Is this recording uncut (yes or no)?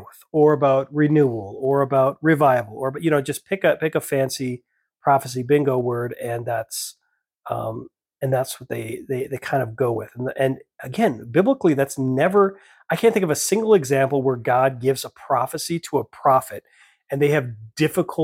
yes